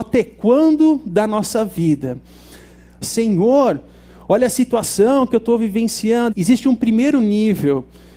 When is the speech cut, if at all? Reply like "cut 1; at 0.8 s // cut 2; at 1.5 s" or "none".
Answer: cut 1; at 3.0 s // cut 2; at 6.3 s